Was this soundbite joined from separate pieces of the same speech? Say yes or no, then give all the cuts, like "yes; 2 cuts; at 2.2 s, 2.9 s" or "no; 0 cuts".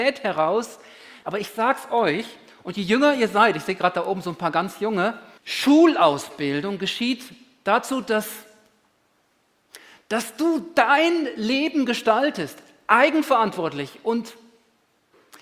yes; 2 cuts; at 1.2 s, 5.4 s